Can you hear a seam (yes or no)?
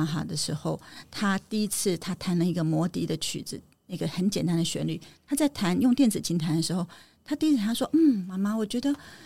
no